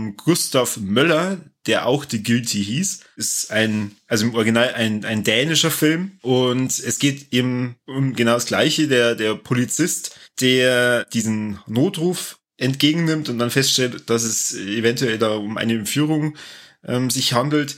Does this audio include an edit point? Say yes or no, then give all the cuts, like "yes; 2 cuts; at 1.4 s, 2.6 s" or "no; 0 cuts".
no; 0 cuts